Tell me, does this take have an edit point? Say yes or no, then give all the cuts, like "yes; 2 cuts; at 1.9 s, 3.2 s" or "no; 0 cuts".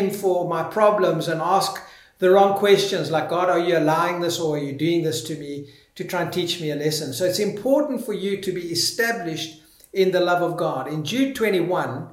no; 0 cuts